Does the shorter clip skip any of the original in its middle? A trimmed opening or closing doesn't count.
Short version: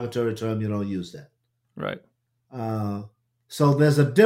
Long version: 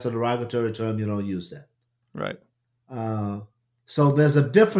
no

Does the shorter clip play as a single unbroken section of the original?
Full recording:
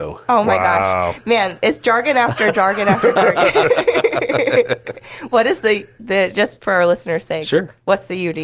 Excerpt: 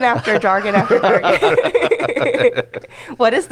yes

